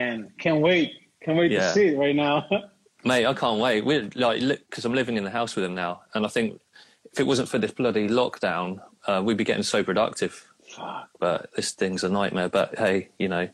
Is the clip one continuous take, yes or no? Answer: yes